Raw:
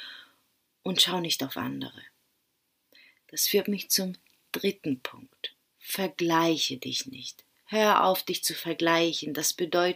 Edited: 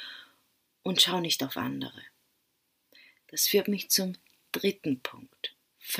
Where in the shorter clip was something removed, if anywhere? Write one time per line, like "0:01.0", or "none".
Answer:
none